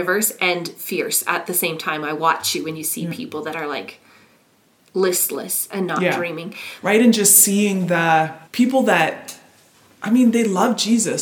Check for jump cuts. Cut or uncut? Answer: cut